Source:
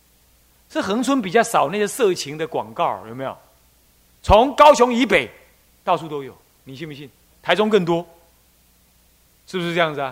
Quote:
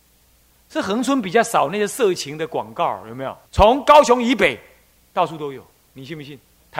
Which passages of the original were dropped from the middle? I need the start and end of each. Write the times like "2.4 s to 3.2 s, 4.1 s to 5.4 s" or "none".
3.5 s to 4.2 s